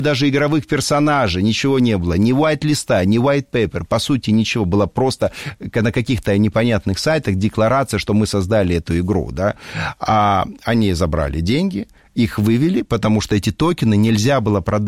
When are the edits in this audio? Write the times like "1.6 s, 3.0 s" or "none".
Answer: none